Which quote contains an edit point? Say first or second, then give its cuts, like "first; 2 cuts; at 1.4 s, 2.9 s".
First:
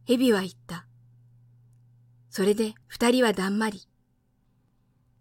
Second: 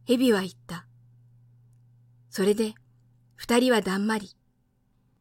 first; 1 cut; at 2.8 s